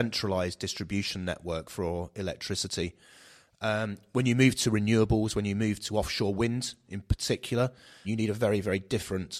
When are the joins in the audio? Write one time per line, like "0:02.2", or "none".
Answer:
0:08.0